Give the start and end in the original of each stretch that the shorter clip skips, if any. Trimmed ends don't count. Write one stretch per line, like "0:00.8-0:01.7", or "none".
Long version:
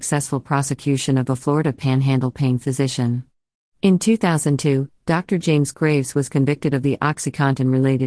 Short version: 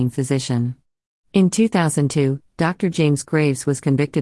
none